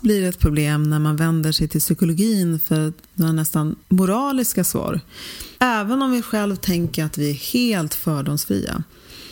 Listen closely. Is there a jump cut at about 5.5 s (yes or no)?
yes